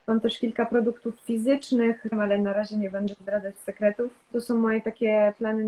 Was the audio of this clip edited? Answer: yes; 2 cuts; at 2.1 s, 4.3 s

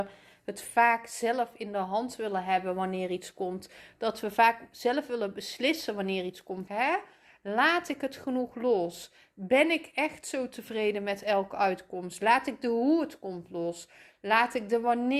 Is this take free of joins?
no; 1 cut; at 6.7 s

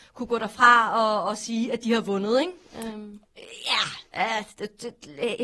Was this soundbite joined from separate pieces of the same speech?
yes; 1 cut; at 3.2 s

